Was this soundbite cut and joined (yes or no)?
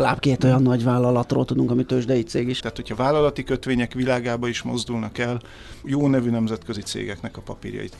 yes